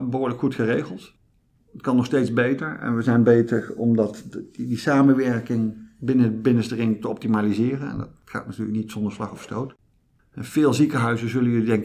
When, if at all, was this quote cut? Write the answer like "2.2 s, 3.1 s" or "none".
none